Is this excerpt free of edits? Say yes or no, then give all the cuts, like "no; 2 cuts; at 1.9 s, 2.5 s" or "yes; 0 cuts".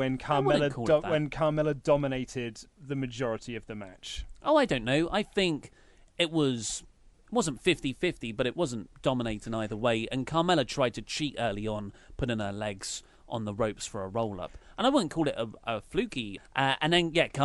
no; 1 cut; at 16.4 s